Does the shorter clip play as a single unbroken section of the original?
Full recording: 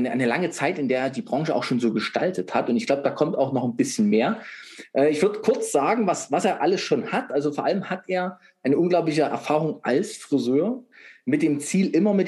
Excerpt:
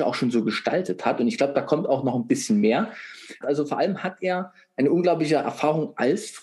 no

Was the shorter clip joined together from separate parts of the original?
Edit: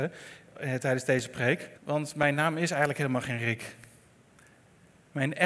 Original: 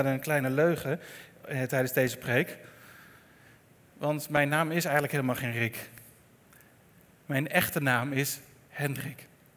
yes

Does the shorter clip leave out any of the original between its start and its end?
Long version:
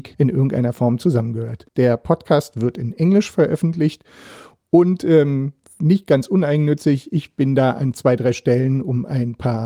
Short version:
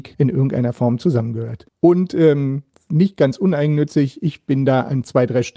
yes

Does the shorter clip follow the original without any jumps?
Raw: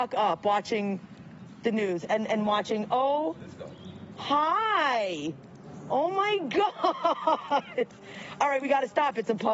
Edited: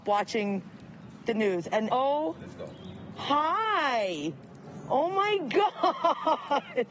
no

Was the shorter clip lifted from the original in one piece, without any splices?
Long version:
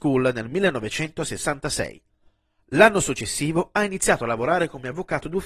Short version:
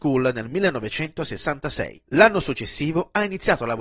no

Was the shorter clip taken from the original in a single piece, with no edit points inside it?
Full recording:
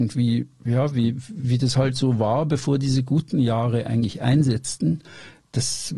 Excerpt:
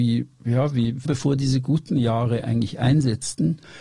no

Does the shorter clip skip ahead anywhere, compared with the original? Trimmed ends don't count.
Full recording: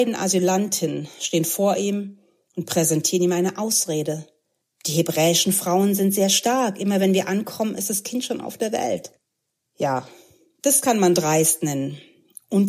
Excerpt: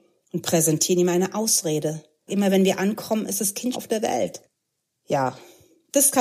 yes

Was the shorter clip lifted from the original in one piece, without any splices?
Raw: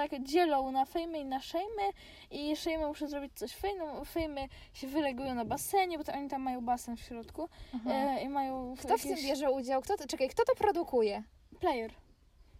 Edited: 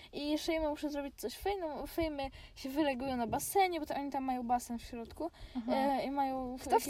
yes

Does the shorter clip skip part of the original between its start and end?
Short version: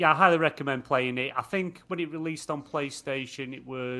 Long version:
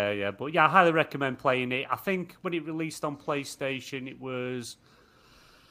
no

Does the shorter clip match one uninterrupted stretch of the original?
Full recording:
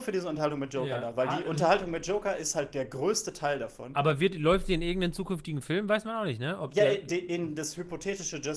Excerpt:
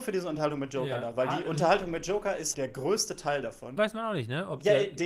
no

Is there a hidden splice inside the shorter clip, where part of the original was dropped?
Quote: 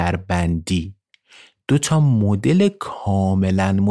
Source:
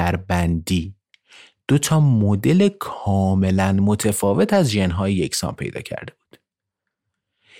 no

